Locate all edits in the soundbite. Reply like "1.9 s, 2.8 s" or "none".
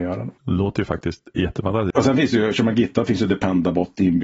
1.9 s